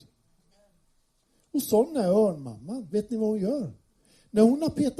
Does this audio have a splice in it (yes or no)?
no